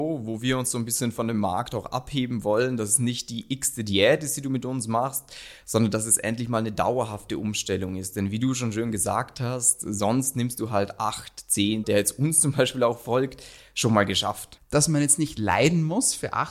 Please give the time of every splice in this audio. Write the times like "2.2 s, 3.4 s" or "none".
11.8 s, 14.6 s